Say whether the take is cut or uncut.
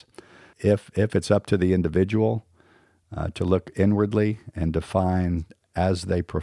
uncut